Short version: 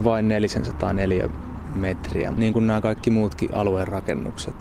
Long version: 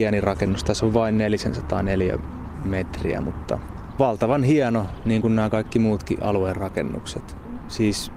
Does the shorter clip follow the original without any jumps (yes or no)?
no